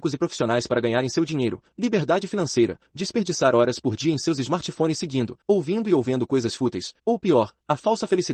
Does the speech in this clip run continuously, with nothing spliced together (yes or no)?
no